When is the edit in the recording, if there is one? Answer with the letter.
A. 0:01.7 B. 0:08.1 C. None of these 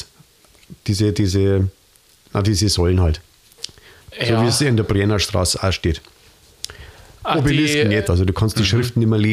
B